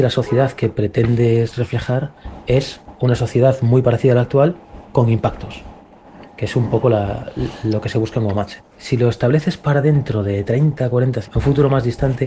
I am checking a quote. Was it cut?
yes; 2 cuts; at 8.6 s, 11.2 s

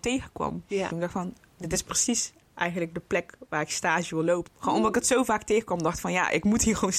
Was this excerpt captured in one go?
no; 2 cuts; at 0.9 s, 4.5 s

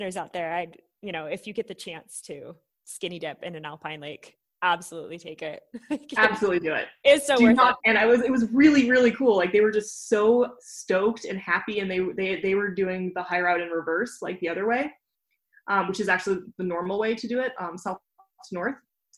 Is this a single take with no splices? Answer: no; 1 cut; at 7.8 s

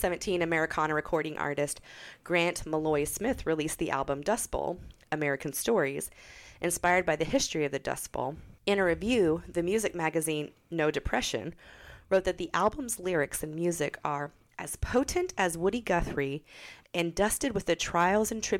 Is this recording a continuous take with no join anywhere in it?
no; 2 cuts; at 8.6 s, 16.8 s

